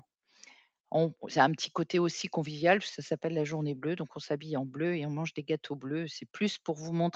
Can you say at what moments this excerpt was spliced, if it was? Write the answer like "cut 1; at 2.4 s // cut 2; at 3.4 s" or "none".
none